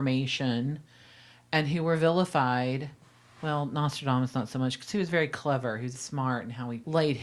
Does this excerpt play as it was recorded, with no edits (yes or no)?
no